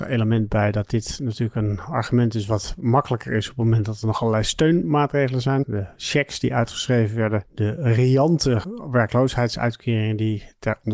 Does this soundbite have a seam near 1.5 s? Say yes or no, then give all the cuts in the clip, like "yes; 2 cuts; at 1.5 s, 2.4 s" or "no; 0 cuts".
no; 1 cut; at 5.6 s